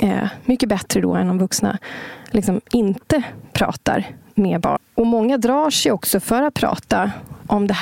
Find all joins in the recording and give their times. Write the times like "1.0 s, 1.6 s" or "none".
4.8 s

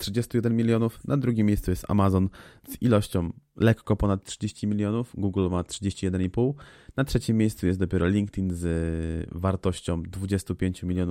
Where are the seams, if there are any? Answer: none

